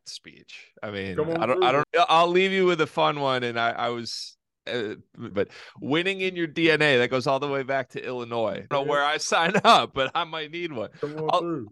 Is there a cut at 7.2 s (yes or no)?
no